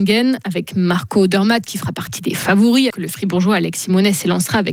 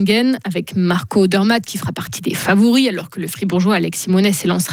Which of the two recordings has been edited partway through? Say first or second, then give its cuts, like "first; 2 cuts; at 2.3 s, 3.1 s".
first; 1 cut; at 2.9 s